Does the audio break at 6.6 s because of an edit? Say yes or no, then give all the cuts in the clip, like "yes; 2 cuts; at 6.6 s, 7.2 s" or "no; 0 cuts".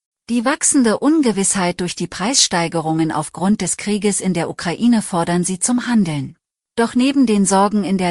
yes; 1 cut; at 6.6 s